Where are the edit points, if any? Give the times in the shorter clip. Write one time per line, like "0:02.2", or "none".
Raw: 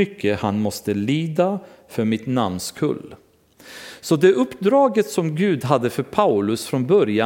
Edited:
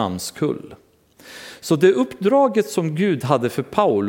none